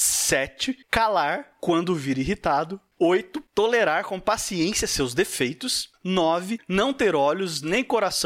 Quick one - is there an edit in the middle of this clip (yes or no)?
no